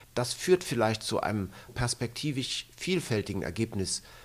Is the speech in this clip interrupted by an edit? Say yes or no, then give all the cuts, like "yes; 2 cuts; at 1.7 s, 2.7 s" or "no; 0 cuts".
yes; 1 cut; at 1.7 s